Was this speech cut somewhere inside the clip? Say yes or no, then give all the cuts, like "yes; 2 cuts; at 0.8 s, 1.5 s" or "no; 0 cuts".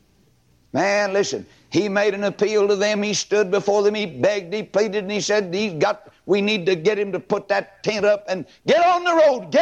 no; 0 cuts